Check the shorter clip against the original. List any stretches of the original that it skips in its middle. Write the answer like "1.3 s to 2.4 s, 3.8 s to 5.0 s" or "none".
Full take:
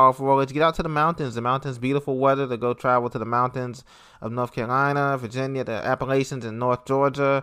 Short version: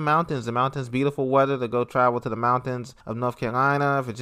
3.9 s to 4.1 s